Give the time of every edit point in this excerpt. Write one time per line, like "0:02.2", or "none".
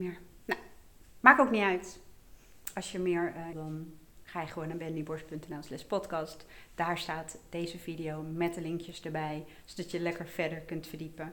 0:03.5